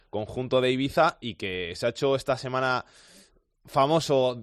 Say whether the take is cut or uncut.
uncut